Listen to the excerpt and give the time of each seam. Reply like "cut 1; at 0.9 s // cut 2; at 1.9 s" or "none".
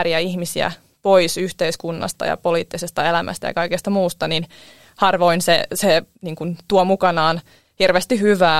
cut 1; at 6.1 s